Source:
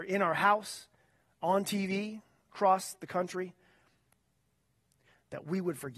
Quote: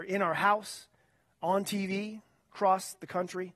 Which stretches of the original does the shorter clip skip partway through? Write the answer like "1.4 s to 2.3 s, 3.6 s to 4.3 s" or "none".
none